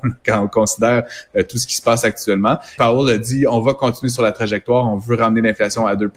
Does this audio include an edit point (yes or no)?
yes